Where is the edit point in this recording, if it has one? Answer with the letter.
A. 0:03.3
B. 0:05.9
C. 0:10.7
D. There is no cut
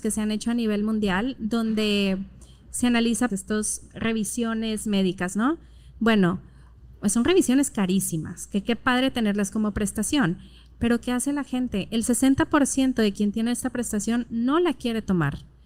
A